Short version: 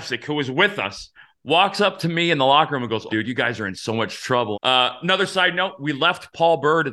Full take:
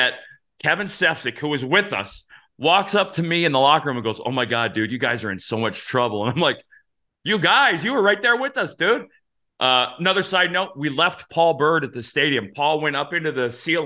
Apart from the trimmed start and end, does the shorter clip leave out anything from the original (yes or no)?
yes